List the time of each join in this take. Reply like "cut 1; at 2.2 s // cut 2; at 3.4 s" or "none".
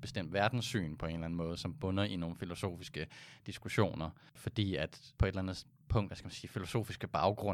cut 1; at 4.3 s // cut 2; at 6.1 s